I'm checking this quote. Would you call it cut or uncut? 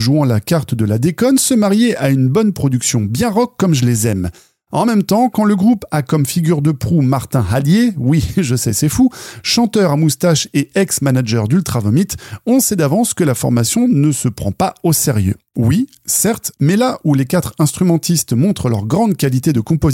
uncut